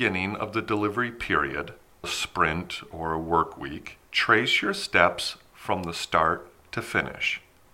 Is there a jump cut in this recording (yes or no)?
yes